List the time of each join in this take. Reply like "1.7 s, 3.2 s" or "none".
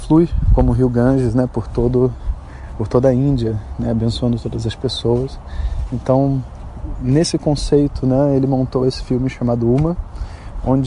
none